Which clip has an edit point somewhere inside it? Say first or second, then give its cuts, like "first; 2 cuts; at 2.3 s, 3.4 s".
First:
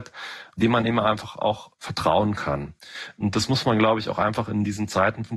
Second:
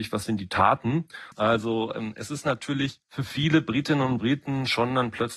second; 2 cuts; at 1.3 s, 3.0 s